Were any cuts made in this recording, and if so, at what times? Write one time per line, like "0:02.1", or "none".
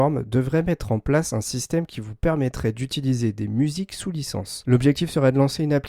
0:04.6